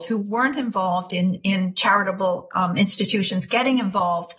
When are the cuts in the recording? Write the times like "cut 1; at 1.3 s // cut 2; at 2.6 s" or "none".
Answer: none